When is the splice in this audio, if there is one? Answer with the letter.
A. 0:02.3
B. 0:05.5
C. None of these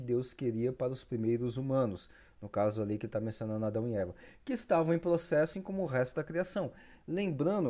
B